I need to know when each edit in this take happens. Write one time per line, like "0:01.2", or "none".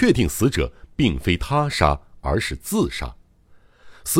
none